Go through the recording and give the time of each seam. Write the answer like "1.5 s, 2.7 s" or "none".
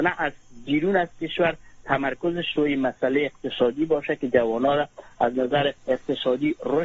5.8 s

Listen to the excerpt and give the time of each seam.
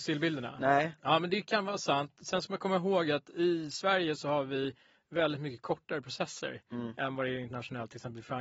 none

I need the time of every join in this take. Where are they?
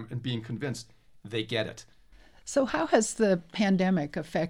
none

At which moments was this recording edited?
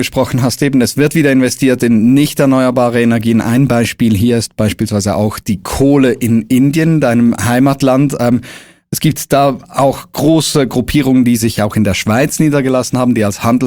none

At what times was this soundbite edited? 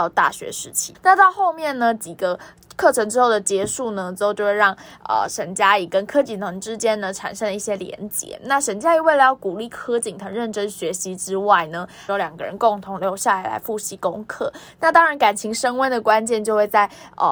0.9 s, 12.1 s

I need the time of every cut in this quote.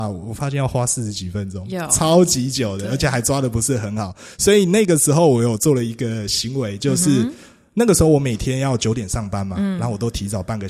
none

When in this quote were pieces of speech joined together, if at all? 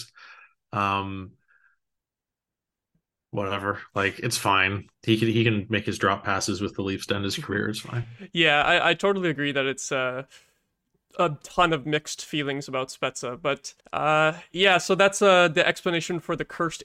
4.9 s, 13.8 s

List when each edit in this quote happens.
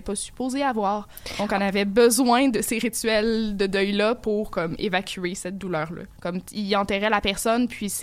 6.2 s

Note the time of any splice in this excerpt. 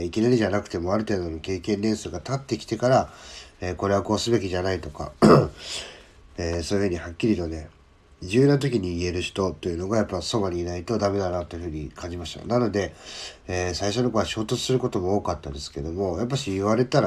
none

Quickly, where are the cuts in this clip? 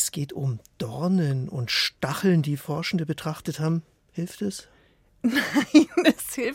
none

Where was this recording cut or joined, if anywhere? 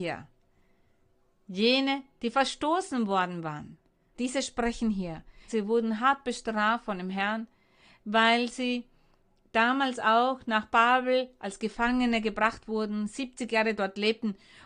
4.1 s, 5.5 s

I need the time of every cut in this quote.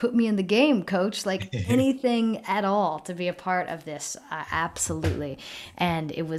none

